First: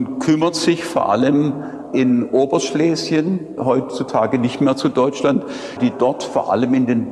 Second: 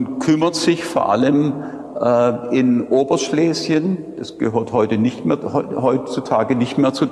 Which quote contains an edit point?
first; 3 cuts; at 1.9 s, 3.6 s, 5.8 s

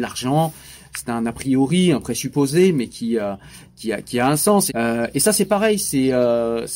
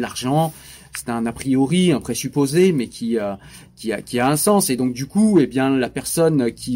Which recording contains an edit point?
first; 1 cut; at 4.7 s

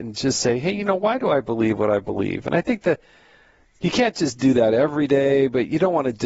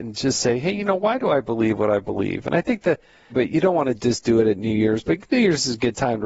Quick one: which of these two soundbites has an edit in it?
second; 1 cut; at 3.3 s

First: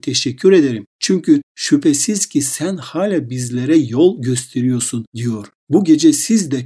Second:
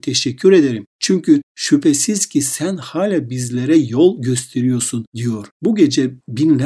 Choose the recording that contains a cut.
second; 1 cut; at 5.5 s

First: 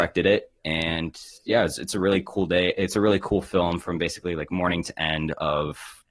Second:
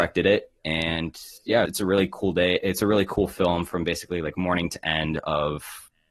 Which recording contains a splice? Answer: second; 1 cut; at 1.7 s

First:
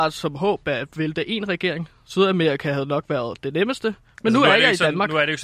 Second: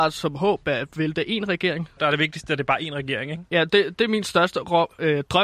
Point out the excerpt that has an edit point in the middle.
second; 1 cut; at 2.0 s

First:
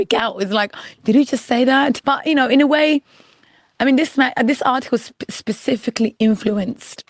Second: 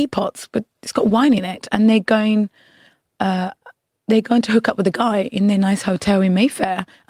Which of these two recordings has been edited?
first; 1 cut; at 2.0 s

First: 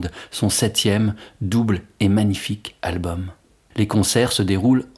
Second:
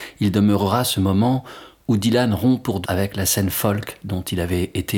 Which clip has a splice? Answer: second; 1 cut; at 2.8 s

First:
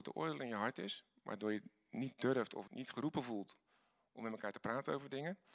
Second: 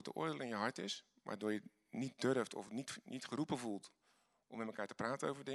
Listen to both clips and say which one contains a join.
first; 1 cut; at 2.7 s

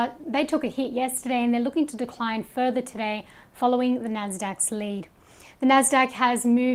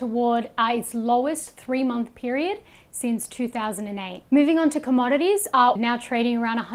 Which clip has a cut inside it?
second; 2 cuts; at 4.3 s, 5.8 s

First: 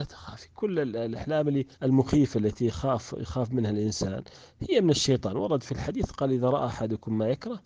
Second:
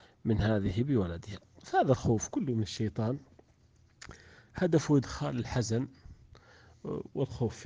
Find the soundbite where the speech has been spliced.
first; 1 cut; at 1.7 s

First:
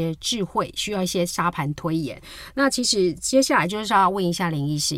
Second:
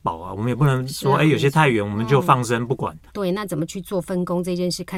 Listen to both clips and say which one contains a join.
second; 1 cut; at 3.1 s

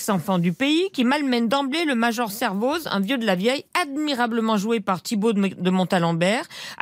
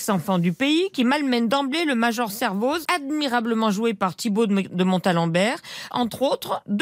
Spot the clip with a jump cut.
second; 2 cuts; at 2.8 s, 5.9 s

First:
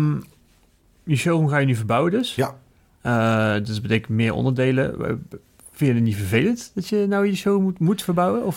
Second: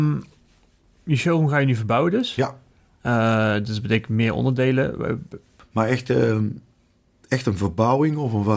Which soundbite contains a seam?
second; 1 cut; at 5.6 s

